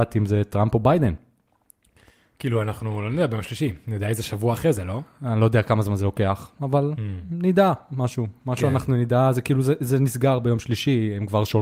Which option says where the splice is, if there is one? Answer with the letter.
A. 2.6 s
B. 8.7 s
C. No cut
C